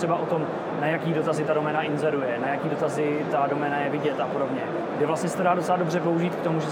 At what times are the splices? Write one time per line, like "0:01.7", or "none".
none